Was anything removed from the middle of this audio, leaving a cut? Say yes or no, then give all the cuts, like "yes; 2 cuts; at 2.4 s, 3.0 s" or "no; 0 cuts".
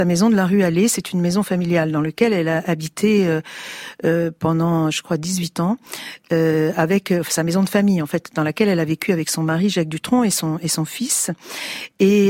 no; 0 cuts